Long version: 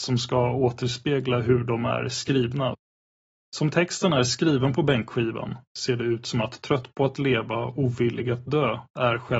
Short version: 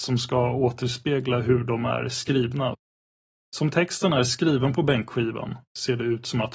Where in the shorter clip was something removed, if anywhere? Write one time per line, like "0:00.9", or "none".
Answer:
none